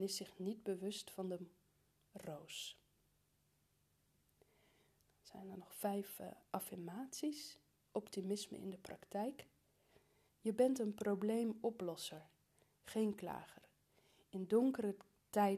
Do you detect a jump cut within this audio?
yes; 1 cut; at 10.3 s

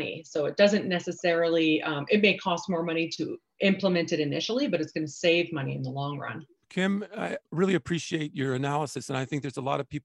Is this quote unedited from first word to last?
no; 1 cut; at 7.4 s

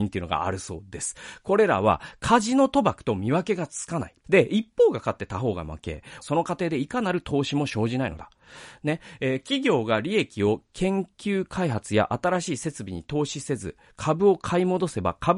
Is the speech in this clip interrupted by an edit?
yes; 2 cuts; at 4.2 s, 6.2 s

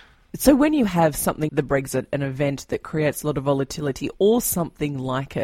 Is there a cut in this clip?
yes; 1 cut; at 1.5 s

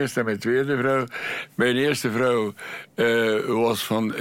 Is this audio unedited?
yes; 0 cuts

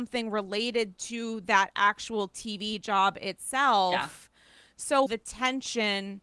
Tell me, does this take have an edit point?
yes; 1 cut; at 5.1 s

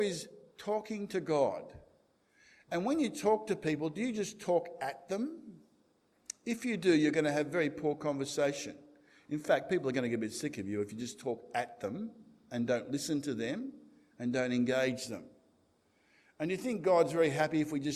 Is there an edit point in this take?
no; 0 cuts

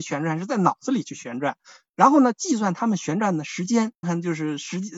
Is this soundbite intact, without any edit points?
no; 1 cut; at 4.0 s

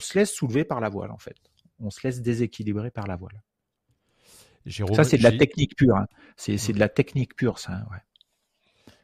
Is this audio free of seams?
yes; 0 cuts

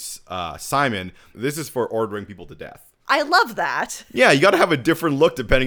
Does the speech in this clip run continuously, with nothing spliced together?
no; 2 cuts; at 1.3 s, 3.0 s

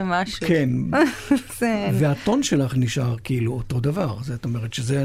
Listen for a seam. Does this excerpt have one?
no; 0 cuts

